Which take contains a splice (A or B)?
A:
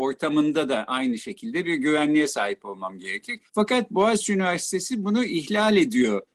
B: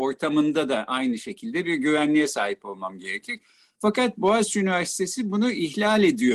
A